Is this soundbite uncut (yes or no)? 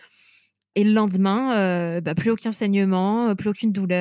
yes